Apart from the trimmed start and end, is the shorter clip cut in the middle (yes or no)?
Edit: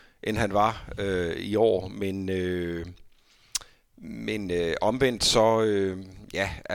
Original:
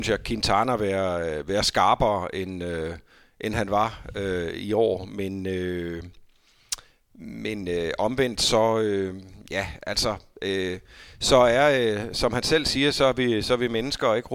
no